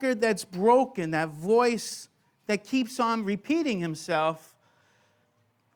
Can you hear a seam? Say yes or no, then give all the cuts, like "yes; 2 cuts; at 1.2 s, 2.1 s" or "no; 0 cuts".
no; 0 cuts